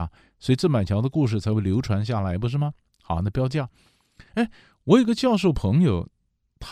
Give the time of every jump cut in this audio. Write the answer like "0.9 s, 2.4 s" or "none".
none